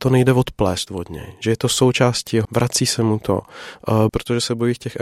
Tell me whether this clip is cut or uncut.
cut